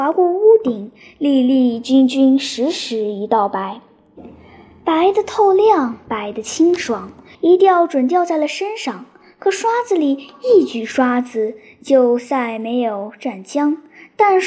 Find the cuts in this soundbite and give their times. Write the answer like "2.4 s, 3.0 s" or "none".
7.3 s